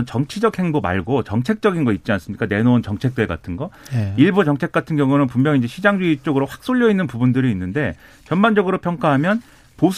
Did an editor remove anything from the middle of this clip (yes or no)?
no